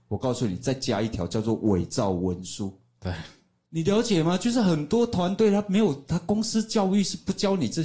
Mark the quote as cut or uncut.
uncut